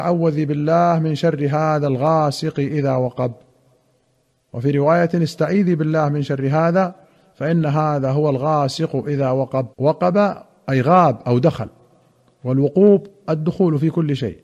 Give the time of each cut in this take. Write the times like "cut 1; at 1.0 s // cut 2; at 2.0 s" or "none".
cut 1; at 9.7 s